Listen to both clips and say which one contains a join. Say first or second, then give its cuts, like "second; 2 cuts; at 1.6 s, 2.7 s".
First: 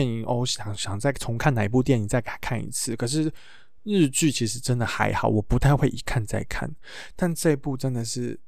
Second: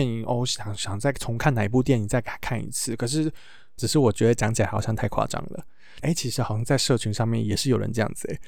second; 2 cuts; at 3.8 s, 6.0 s